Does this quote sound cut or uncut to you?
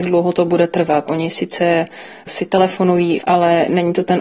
cut